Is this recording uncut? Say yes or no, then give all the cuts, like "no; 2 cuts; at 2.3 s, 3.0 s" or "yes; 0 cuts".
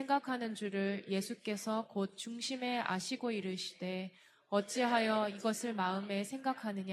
yes; 0 cuts